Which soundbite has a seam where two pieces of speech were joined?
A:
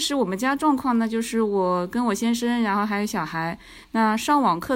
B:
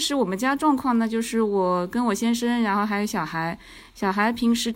A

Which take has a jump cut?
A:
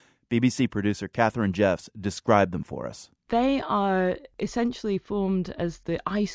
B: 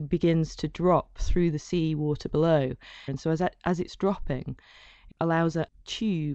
B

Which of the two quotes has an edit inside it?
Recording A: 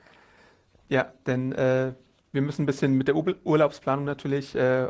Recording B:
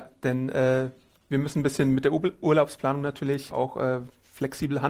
B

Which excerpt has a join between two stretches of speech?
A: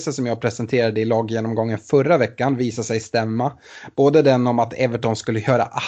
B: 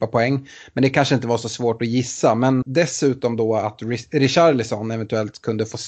B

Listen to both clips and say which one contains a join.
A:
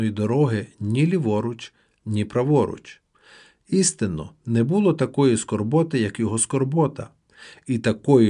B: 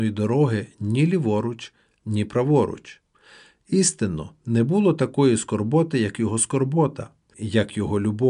B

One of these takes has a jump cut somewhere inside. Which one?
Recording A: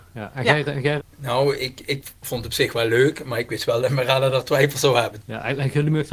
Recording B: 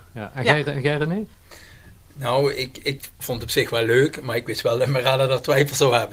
A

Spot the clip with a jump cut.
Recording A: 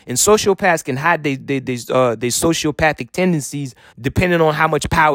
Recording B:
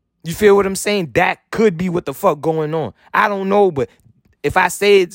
A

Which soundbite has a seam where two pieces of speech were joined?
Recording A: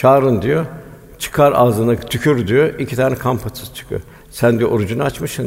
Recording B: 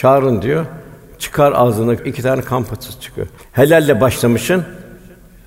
B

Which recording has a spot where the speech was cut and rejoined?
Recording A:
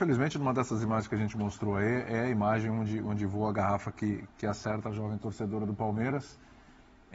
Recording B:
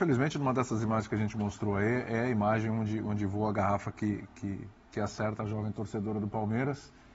A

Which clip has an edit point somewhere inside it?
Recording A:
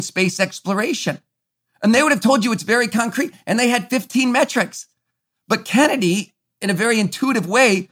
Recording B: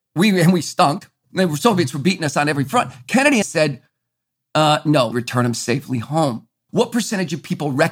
B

